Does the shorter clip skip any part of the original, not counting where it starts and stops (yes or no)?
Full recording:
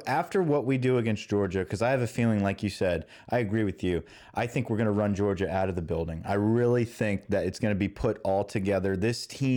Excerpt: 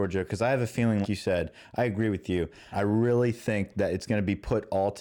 yes